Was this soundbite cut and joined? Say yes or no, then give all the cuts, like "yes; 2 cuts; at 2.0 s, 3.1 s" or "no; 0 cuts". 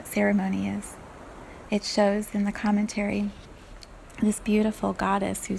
yes; 1 cut; at 1.7 s